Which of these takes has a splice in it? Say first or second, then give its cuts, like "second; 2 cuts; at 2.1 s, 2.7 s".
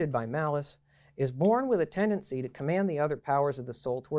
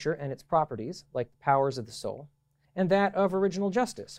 second; 1 cut; at 2.6 s